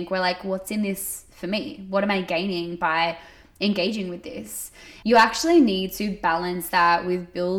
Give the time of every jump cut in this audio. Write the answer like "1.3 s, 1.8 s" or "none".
5.0 s